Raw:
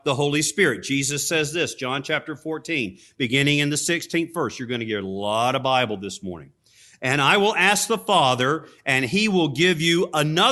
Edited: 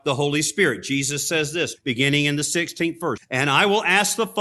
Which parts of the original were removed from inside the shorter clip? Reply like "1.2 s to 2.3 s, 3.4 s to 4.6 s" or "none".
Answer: 1.8 s to 3.1 s, 4.5 s to 6.9 s